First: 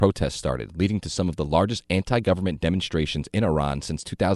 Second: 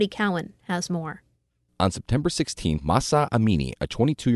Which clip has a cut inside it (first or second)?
second